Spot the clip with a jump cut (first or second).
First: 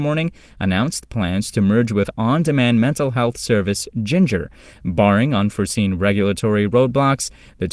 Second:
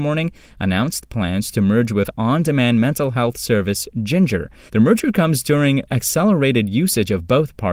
second